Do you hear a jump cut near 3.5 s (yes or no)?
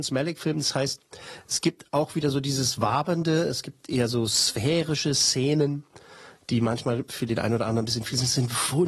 no